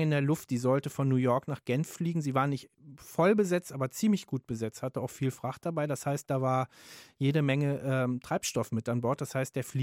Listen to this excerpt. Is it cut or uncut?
uncut